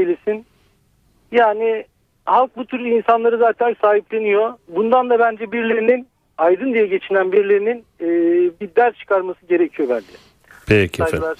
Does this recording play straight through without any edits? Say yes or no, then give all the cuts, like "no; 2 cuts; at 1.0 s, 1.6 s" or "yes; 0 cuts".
yes; 0 cuts